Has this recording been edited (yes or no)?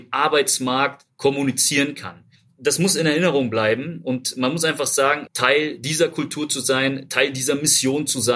yes